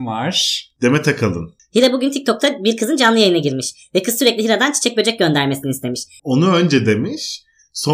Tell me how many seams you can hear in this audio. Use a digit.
2